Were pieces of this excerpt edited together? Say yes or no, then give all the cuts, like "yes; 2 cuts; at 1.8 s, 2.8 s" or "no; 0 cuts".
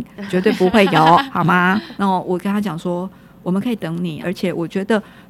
yes; 2 cuts; at 2.0 s, 4.2 s